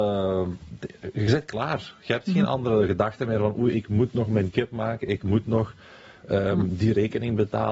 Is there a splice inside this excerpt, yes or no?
no